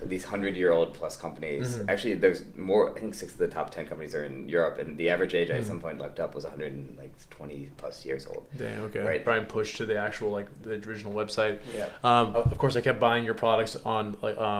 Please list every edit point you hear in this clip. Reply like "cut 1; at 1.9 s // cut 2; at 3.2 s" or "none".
cut 1; at 9.2 s // cut 2; at 12.3 s